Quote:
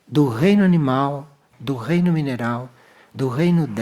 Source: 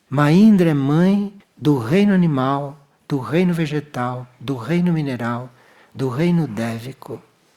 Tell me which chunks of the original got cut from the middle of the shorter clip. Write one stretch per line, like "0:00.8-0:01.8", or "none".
0:03.0-0:04.3

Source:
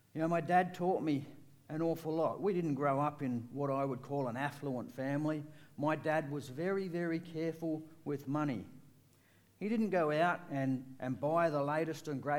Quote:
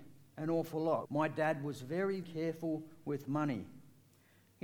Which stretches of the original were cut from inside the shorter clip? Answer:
0:02.4-0:05.7
0:06.9-0:07.2

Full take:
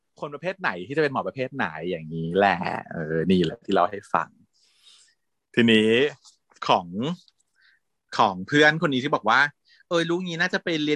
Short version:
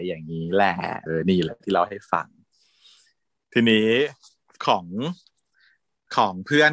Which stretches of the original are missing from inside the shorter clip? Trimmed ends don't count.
0:02.9-0:03.1

